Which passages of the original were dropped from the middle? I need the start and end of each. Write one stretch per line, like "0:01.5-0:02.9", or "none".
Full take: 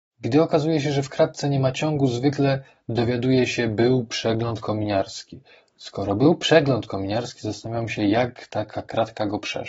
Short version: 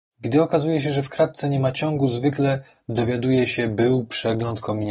none